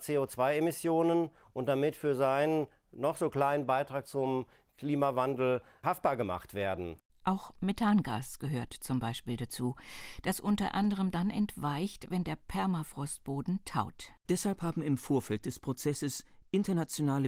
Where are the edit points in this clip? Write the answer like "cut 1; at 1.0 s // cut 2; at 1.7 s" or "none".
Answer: cut 1; at 7.1 s // cut 2; at 14.2 s